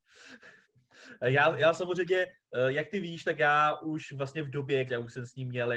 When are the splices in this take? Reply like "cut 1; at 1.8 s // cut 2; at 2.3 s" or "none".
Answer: cut 1; at 4.9 s